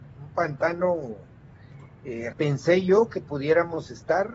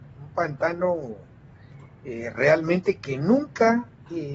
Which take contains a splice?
first; 1 cut; at 2.3 s

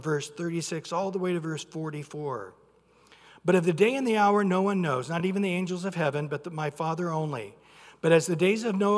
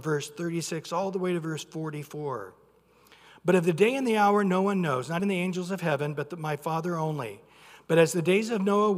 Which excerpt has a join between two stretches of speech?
second; 1 cut; at 5.2 s

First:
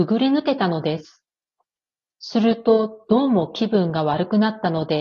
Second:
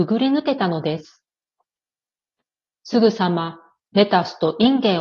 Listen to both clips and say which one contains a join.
first; 1 cut; at 2.1 s

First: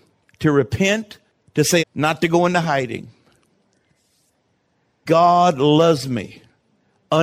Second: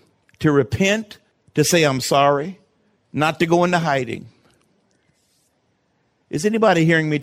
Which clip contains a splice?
first; 2 cuts; at 1.8 s, 5.1 s

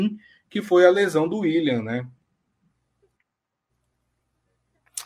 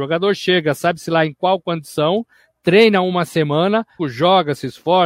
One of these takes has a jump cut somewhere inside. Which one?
second; 1 cut; at 4.0 s

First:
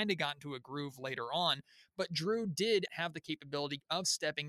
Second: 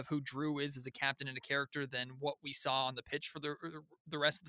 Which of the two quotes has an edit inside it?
first; 1 cut; at 2.9 s

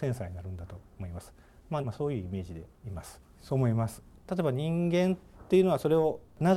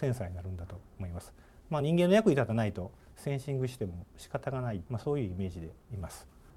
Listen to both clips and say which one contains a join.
first; 2 cuts; at 1.8 s, 3.3 s

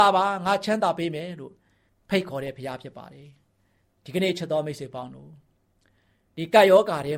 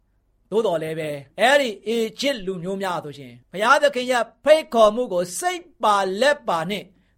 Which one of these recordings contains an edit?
second; 2 cuts; at 1.3 s, 3.4 s

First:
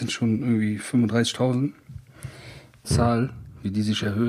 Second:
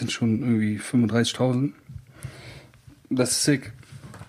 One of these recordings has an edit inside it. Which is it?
first; 1 cut; at 2.8 s

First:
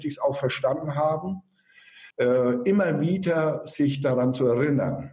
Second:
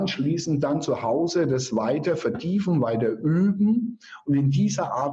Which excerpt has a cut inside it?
first; 1 cut; at 2.1 s

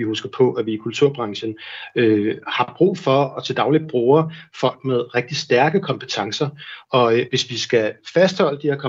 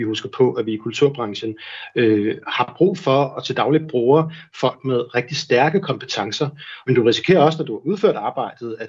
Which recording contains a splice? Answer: second; 1 cut; at 6.8 s

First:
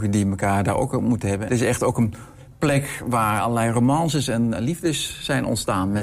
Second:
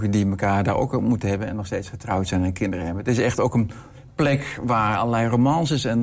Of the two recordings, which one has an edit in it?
first; 1 cut; at 1.5 s

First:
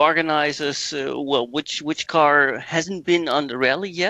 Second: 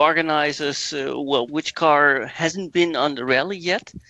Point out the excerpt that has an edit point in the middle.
second; 1 cut; at 1.5 s

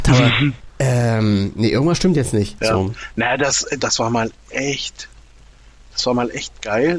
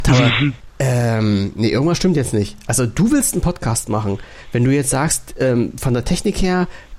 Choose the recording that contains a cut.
first; 2 cuts; at 2.6 s, 3.8 s

